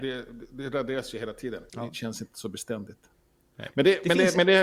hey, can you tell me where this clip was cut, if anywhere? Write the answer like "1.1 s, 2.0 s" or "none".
1.7 s